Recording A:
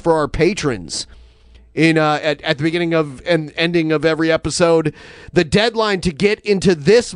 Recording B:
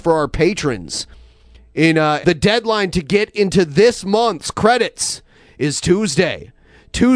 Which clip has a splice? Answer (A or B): B